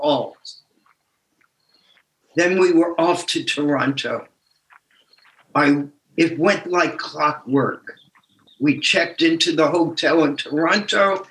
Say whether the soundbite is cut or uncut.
uncut